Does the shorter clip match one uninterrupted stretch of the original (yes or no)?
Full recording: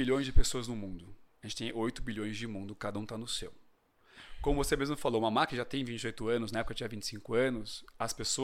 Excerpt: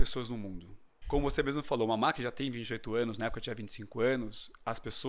no